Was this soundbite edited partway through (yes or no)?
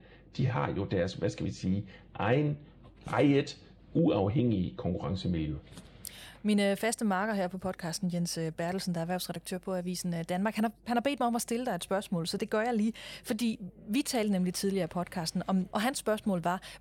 yes